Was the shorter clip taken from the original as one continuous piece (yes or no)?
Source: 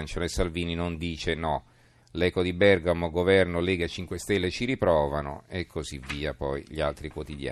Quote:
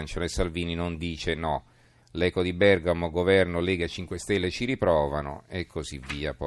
yes